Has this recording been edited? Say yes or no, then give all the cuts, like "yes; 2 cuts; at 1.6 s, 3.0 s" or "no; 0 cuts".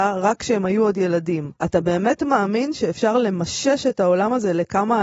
yes; 1 cut; at 1.5 s